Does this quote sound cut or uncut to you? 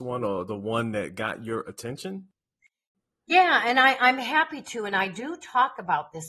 uncut